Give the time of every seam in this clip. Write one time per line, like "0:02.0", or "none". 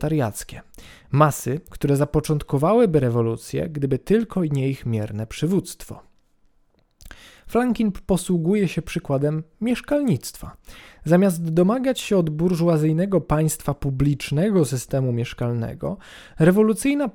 none